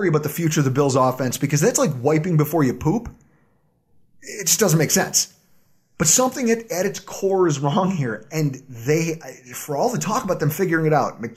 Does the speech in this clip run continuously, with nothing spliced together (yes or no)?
yes